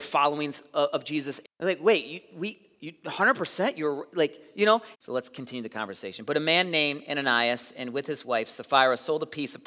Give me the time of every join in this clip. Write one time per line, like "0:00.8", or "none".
0:01.4
0:04.9